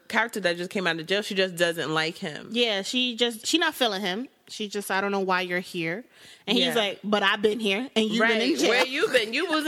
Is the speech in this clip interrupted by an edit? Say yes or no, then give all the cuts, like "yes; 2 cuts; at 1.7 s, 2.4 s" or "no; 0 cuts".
no; 0 cuts